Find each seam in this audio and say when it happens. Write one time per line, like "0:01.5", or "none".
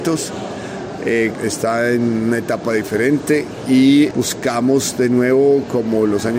0:01.3
0:04.1